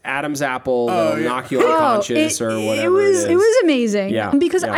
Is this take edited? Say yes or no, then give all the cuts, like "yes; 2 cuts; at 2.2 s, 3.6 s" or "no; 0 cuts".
yes; 1 cut; at 3.3 s